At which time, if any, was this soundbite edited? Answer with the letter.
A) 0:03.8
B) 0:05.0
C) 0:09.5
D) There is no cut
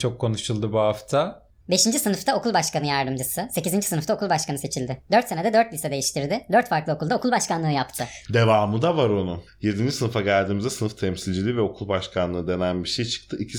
C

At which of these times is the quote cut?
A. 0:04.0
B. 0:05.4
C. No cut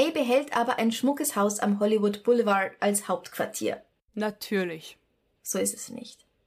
B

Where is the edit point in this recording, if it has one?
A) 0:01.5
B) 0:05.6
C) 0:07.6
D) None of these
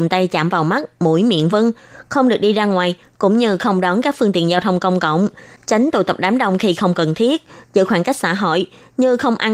A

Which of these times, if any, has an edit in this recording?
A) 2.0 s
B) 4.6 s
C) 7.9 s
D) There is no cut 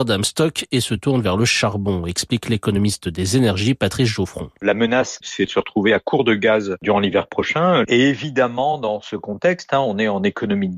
D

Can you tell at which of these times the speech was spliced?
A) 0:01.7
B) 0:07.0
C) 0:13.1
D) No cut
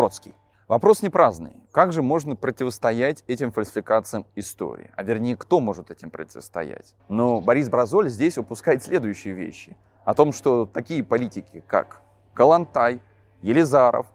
B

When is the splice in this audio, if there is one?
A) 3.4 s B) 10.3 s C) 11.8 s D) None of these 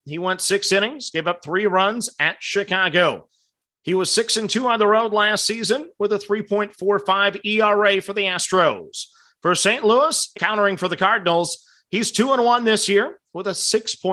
B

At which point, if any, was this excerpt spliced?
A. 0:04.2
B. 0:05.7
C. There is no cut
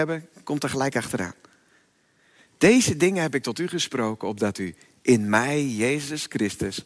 C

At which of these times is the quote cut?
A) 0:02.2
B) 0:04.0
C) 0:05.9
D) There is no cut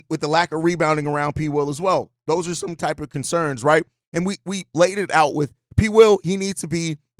D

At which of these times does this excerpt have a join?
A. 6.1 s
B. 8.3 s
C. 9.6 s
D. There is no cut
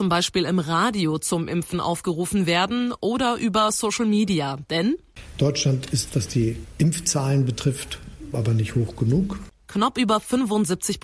B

